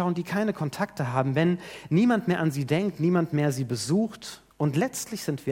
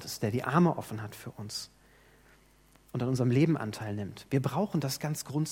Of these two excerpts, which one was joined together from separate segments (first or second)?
first